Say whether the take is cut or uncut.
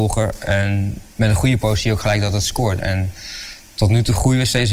cut